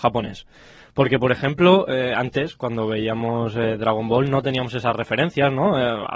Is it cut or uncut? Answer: uncut